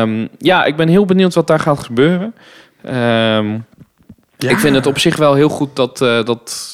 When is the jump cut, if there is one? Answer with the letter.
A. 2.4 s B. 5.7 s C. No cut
C